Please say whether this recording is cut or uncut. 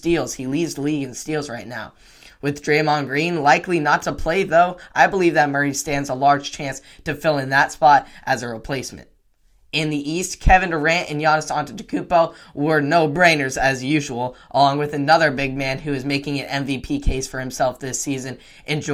uncut